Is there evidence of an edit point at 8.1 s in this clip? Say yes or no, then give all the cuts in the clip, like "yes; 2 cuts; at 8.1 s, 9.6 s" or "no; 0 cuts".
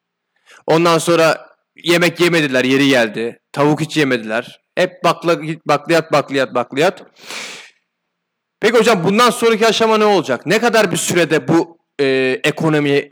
no; 0 cuts